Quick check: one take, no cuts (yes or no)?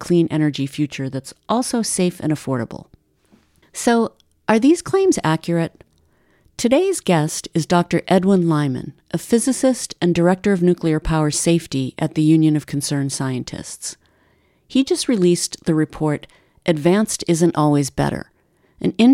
yes